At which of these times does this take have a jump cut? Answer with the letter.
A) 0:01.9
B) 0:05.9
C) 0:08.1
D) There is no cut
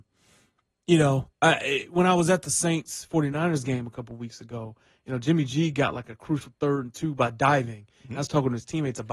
D